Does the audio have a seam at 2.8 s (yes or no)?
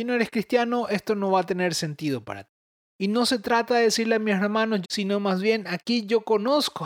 yes